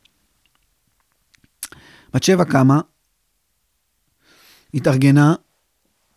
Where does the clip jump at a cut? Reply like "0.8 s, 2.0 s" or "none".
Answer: none

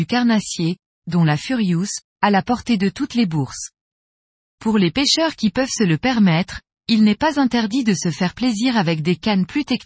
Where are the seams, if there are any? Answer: 2.0 s

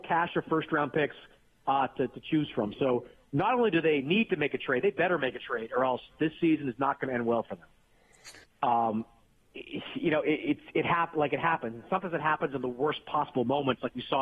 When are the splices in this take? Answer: 8.4 s

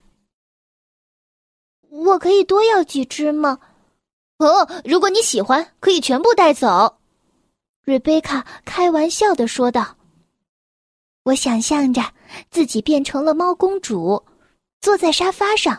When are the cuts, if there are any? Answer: 1.8 s

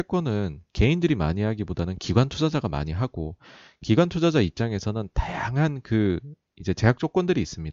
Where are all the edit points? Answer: none

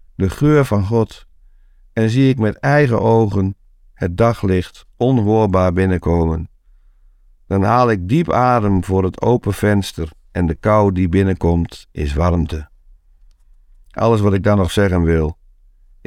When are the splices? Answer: none

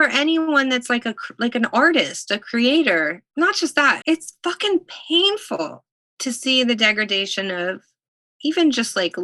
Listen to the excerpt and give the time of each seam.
4.0 s

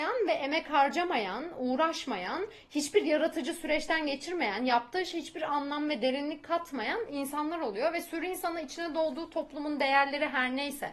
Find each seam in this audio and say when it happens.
none

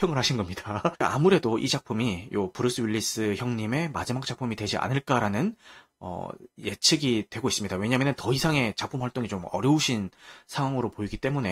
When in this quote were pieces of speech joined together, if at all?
0.9 s

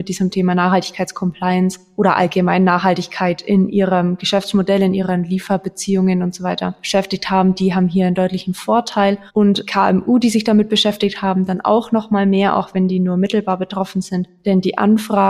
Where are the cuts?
9.3 s

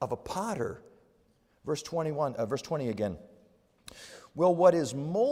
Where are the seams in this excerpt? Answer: none

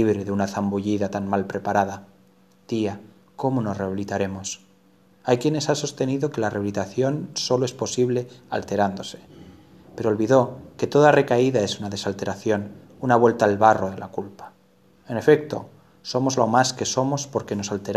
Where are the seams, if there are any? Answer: none

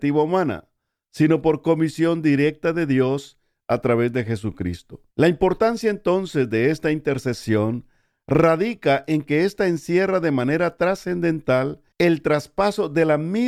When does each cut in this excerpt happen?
5.1 s, 11.9 s

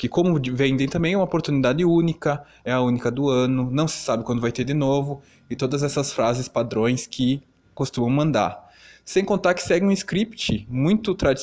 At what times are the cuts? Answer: none

